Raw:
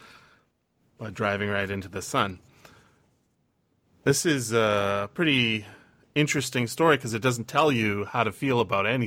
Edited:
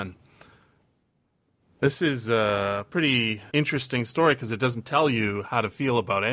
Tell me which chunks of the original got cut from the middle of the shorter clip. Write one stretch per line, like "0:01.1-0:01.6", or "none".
0:05.7-0:06.1